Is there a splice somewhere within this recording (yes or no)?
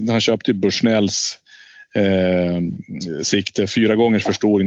no